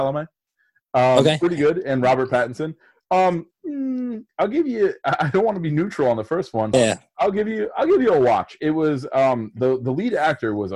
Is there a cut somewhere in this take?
yes; 1 cut; at 6.7 s

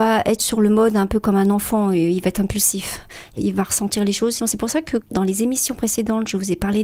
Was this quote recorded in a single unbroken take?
no; 1 cut; at 4.4 s

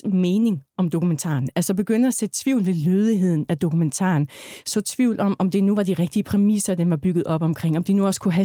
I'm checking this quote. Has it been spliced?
no; 0 cuts

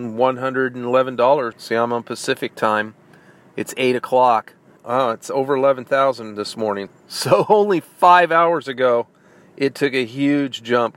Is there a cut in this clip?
yes; 3 cuts; at 1.5 s, 4.8 s, 6.9 s

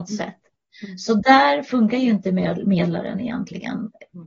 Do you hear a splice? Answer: no; 0 cuts

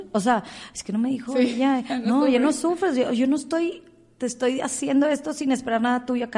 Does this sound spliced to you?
no; 0 cuts

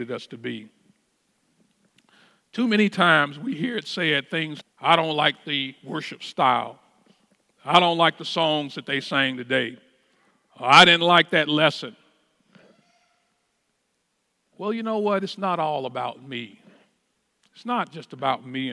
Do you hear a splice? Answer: yes; 1 cut; at 4.6 s

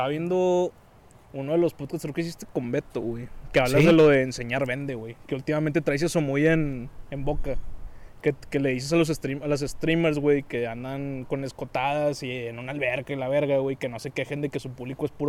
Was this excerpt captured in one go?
yes; 0 cuts

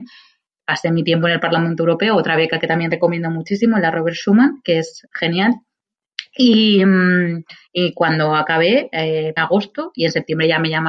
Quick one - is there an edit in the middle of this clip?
yes; 1 cut; at 9.4 s

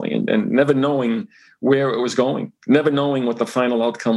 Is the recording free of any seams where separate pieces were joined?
no; 1 cut; at 2.6 s

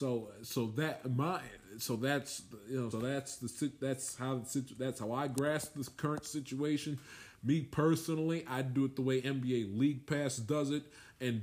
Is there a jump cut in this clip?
yes; 1 cut; at 2.9 s

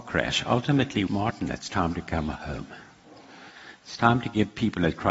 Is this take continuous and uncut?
no; 1 cut; at 1.1 s

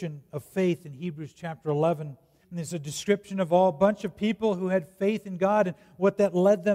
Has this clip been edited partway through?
yes; 1 cut; at 2.4 s

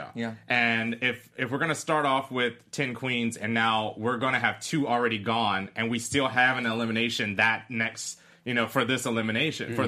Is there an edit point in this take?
no; 0 cuts

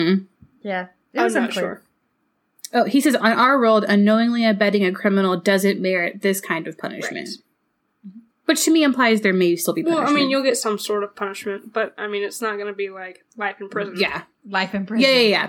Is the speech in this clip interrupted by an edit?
no; 0 cuts

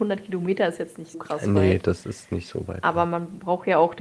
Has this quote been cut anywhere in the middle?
yes; 1 cut; at 1.1 s

